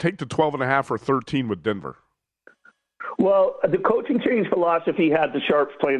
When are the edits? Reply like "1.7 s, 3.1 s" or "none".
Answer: none

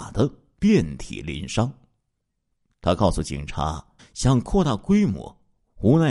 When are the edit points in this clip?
4.0 s

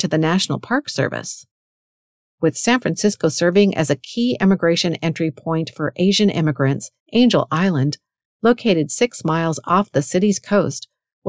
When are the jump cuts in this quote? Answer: 7.0 s

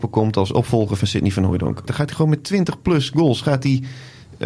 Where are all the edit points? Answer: 1.9 s

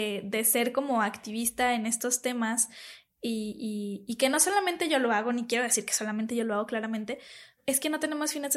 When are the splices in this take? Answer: 7.6 s

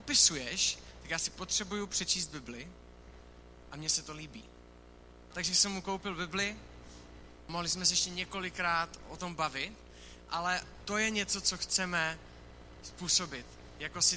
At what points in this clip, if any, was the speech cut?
none

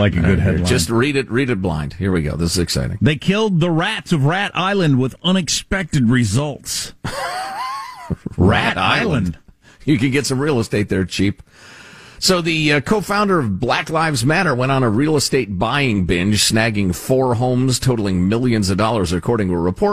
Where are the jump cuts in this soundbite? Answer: none

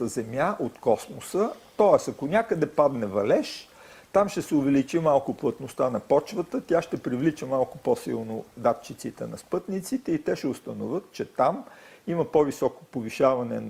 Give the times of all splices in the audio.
none

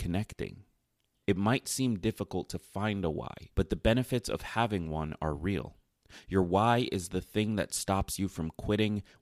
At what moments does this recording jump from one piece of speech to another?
1.2 s, 3.5 s

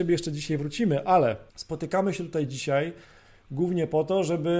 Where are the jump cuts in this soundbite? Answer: 1.5 s

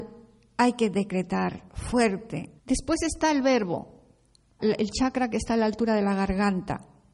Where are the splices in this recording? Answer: 2.6 s, 4.6 s

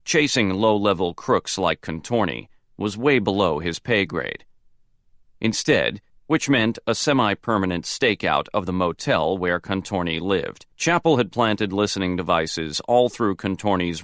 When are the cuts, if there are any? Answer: 6.1 s, 10.7 s

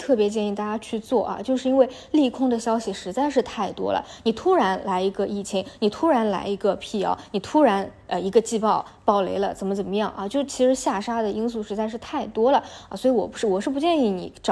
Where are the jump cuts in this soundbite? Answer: none

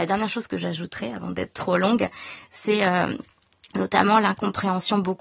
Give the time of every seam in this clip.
none

